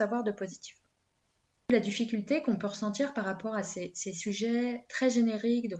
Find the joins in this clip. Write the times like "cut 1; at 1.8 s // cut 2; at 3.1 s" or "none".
none